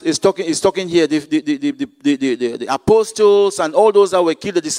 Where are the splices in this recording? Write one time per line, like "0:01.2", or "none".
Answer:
none